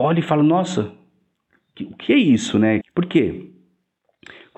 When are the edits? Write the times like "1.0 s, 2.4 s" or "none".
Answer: 2.8 s